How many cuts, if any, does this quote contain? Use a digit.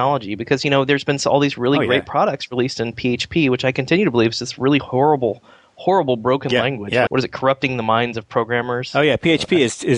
1